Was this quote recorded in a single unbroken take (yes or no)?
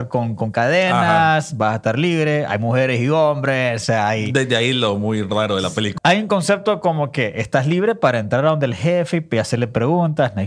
no